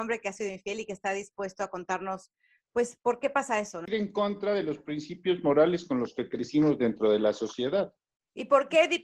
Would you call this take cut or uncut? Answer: cut